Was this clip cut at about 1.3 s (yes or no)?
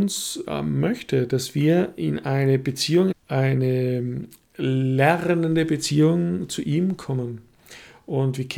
no